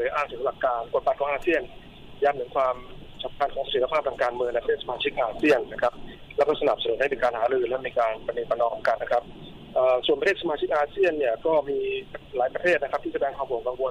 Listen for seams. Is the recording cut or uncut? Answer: cut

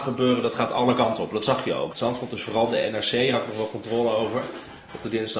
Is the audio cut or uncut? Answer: cut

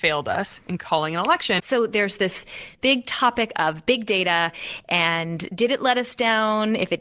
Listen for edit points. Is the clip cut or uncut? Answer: cut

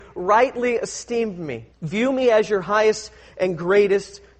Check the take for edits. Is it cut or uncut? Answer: cut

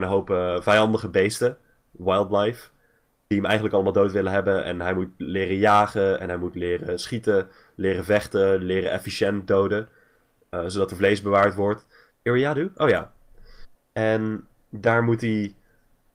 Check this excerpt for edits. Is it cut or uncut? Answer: cut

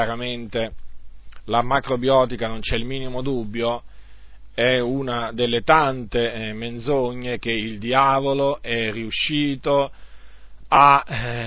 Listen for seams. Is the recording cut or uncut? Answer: uncut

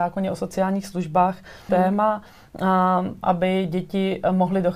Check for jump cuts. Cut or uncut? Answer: cut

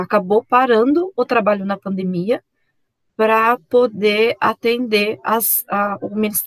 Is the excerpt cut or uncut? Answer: uncut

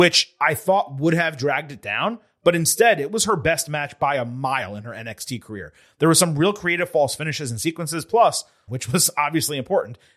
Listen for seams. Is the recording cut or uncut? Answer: cut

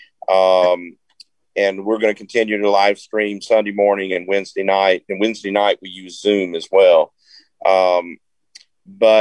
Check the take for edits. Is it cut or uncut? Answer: uncut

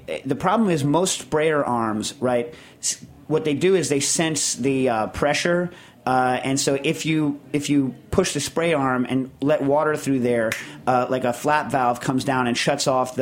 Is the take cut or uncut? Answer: uncut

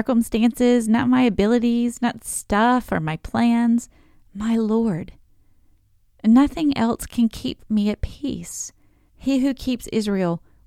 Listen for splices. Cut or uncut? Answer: cut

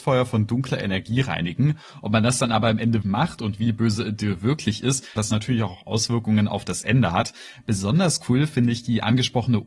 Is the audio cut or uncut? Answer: cut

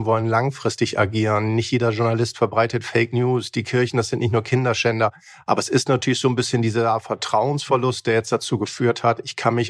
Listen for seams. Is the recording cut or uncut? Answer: uncut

